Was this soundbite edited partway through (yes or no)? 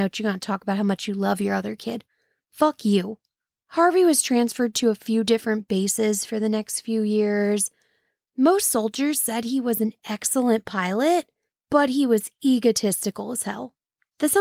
no